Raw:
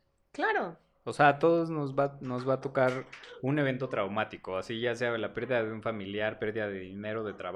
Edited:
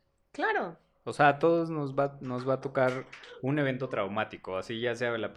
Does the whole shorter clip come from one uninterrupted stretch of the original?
yes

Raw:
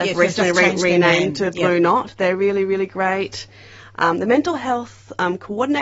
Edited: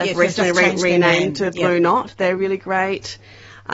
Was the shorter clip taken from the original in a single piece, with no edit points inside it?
no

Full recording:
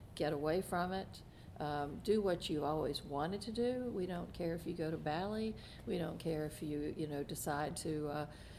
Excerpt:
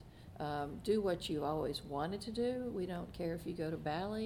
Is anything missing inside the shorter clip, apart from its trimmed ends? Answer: no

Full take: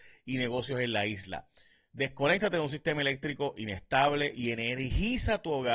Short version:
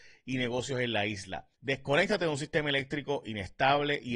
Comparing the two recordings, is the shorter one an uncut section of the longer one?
no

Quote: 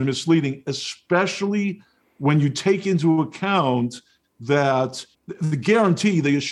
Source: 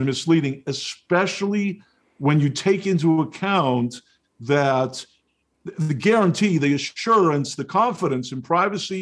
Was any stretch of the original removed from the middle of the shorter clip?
yes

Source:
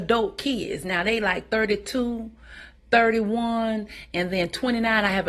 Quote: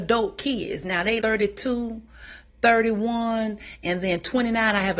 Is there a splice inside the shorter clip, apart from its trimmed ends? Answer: yes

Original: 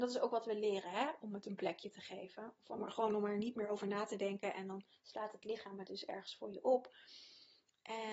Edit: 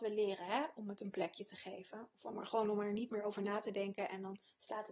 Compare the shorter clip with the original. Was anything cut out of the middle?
no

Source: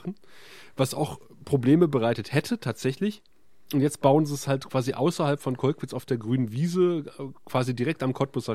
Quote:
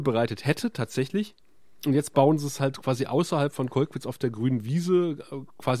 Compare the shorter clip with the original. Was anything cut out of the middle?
no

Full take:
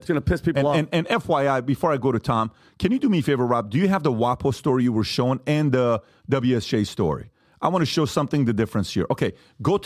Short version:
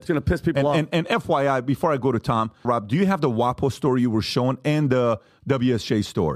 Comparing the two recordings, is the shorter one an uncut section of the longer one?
no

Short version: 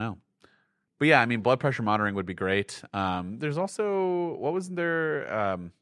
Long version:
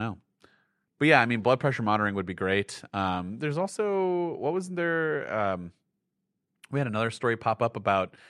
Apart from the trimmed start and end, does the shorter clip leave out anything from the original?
no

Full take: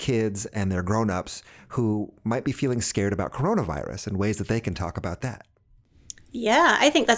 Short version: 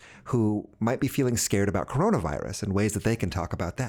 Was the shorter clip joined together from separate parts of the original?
no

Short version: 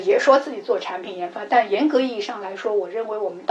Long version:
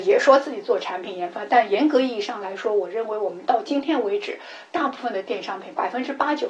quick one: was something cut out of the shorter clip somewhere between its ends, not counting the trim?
no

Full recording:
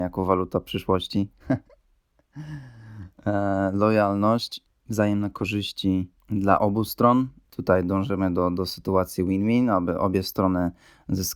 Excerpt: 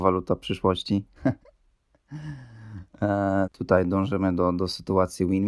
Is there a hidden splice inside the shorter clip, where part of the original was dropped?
yes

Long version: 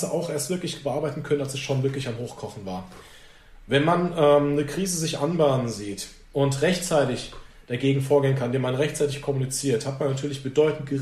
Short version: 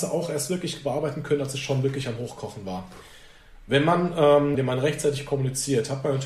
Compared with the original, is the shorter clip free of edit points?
no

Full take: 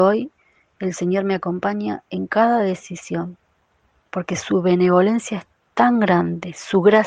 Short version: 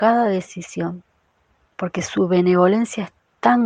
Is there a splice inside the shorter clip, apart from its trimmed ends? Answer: no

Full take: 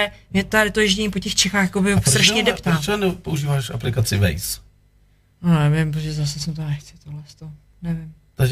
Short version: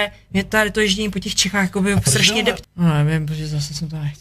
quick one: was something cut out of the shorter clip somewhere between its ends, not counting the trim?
yes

